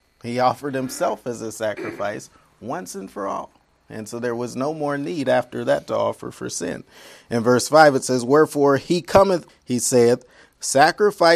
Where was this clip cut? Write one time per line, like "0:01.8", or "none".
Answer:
0:09.5